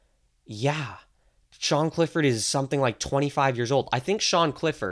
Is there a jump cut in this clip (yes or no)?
no